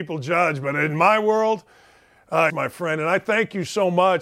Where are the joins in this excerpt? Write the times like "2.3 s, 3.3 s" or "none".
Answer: 2.5 s